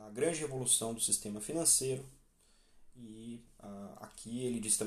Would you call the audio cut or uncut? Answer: uncut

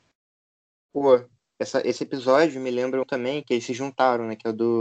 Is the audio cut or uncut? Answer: cut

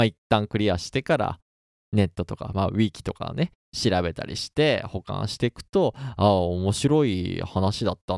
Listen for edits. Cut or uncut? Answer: uncut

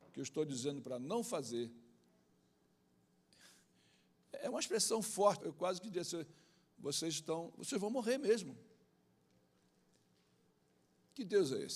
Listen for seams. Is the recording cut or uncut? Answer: cut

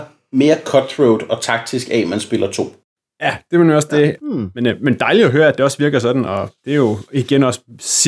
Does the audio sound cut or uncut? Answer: cut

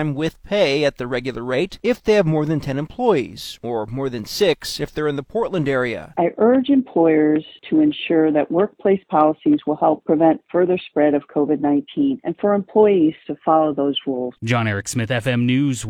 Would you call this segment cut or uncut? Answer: cut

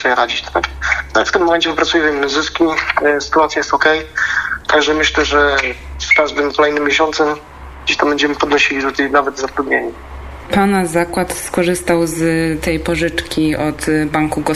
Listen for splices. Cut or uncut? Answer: uncut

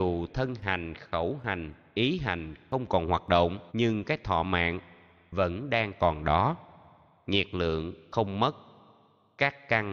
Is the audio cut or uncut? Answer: cut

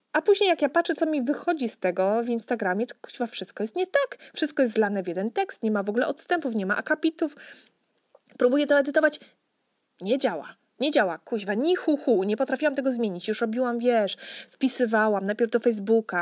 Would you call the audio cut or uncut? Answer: uncut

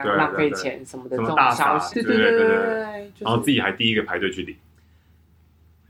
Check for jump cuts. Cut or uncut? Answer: cut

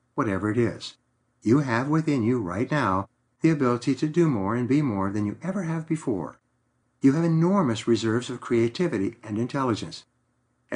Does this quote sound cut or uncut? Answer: cut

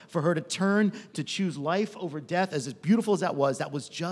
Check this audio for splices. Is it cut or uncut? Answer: uncut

